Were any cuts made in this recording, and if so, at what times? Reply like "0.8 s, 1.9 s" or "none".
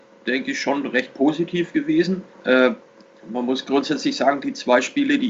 2.3 s

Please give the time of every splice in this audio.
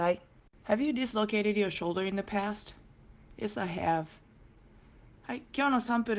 5.2 s

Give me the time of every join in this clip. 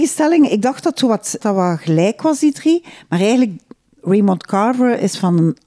1.4 s

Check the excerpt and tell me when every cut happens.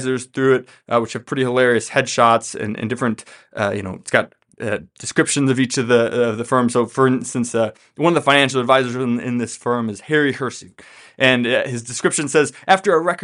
none

